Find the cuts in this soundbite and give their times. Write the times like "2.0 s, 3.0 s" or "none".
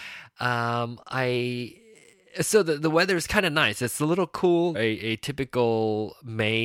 4.7 s